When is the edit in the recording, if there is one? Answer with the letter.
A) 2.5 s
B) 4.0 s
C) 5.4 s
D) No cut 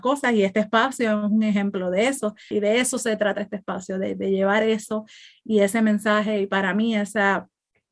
A